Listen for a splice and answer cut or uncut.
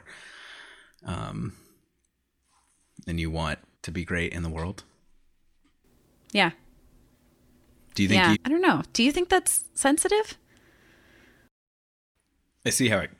cut